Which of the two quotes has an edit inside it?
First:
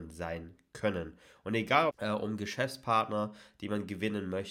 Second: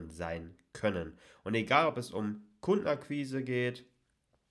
first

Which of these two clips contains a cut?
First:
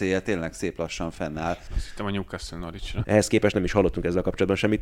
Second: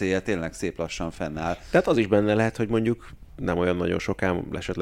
first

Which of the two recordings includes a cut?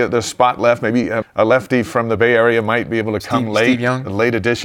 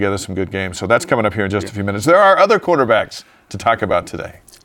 first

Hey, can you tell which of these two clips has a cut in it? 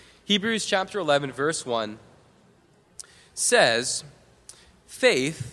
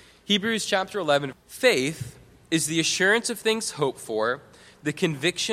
second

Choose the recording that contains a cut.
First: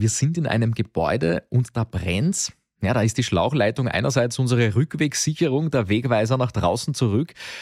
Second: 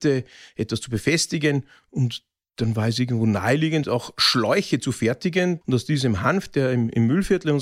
second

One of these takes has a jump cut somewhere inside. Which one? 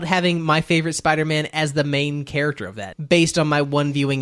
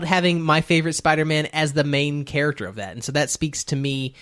first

